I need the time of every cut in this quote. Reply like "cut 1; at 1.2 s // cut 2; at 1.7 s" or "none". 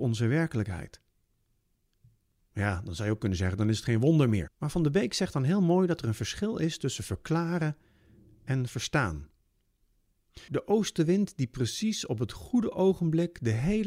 cut 1; at 4.5 s // cut 2; at 10.5 s